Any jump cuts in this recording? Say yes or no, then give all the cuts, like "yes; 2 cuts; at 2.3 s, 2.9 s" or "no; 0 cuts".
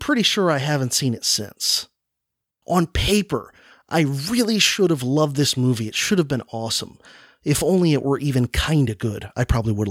yes; 1 cut; at 2.6 s